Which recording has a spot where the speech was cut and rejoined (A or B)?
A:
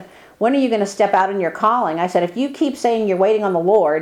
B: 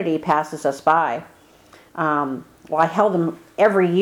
B